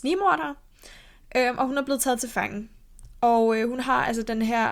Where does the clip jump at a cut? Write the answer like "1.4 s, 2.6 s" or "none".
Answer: none